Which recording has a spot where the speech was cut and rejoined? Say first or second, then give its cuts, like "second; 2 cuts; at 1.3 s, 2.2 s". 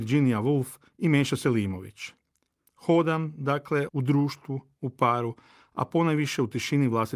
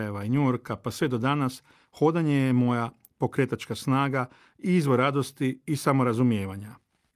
first; 2 cuts; at 2.7 s, 3.9 s